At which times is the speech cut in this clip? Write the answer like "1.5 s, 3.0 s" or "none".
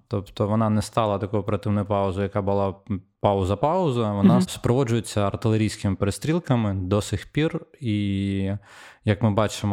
4.4 s